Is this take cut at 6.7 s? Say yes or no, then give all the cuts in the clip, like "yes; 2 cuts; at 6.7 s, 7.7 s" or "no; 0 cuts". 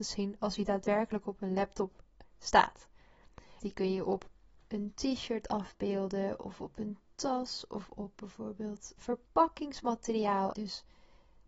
no; 3 cuts; at 3.6 s, 9.0 s, 10.5 s